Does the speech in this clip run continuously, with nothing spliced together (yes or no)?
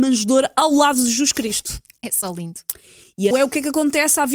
no